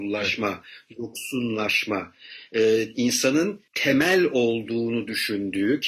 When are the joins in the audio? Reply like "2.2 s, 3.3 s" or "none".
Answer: 3.7 s